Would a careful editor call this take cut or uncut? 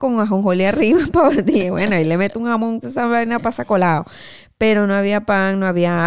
cut